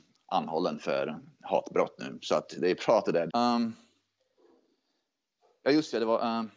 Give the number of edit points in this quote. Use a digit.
1